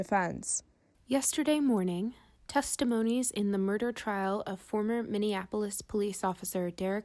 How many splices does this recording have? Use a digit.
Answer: 1